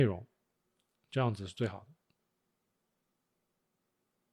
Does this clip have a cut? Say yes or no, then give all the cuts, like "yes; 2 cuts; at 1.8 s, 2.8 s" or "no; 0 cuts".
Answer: no; 0 cuts